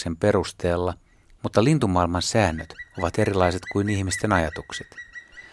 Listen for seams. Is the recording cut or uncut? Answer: uncut